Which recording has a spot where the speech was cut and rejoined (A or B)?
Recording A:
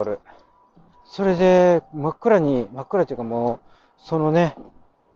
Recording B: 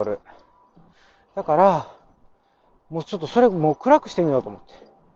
A